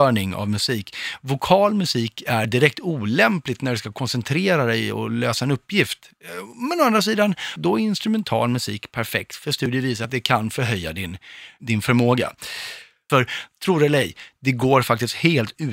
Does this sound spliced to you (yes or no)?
yes